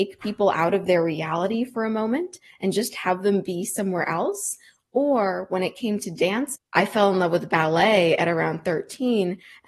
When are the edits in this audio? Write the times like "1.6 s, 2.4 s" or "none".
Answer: 6.5 s